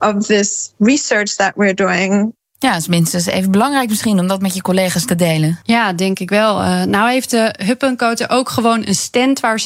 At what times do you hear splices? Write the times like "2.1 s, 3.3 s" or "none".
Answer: 5.6 s